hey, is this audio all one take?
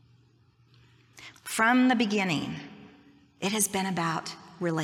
no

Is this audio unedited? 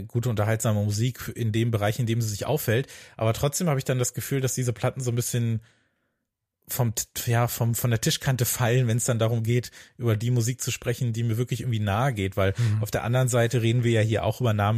yes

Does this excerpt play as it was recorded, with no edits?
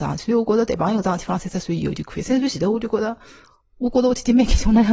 yes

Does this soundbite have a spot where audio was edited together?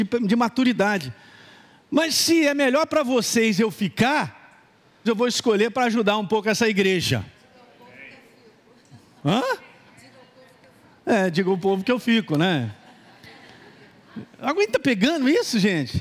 yes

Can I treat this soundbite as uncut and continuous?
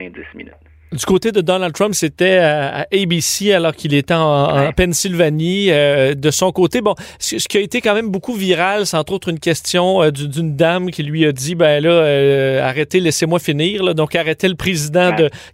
yes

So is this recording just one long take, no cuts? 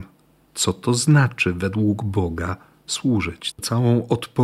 no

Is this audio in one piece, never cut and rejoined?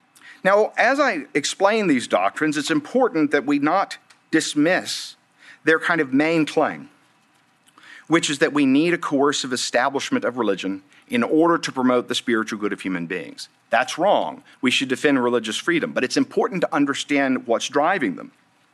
yes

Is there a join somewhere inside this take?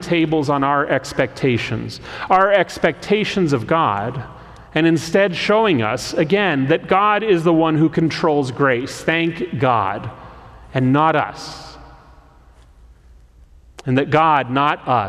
no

